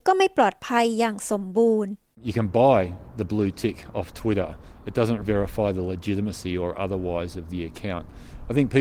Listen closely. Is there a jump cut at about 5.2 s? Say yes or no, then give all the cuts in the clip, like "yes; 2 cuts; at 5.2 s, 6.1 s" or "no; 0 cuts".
yes; 1 cut; at 5.2 s